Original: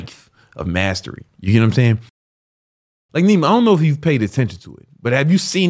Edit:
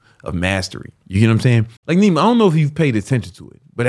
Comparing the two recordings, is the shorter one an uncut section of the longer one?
no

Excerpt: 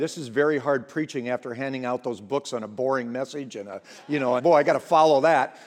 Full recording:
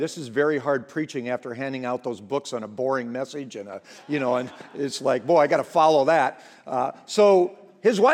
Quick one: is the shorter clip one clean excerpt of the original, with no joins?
no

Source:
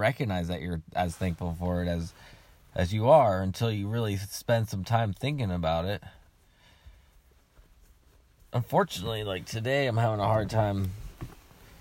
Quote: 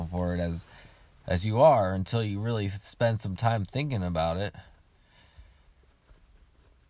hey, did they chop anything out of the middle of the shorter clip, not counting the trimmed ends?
no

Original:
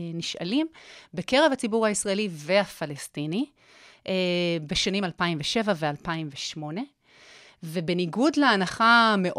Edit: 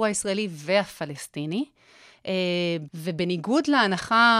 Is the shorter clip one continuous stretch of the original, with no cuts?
no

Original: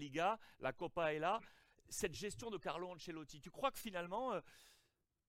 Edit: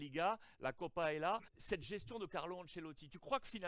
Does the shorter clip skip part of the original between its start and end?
yes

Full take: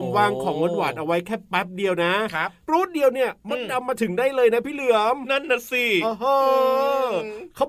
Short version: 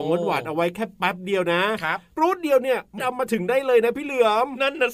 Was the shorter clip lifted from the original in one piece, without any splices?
no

